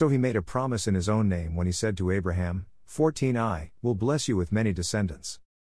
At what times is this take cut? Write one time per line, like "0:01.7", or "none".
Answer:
0:03.8